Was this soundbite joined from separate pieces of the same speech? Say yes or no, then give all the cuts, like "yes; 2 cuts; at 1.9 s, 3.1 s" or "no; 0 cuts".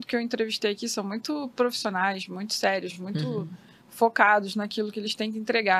no; 0 cuts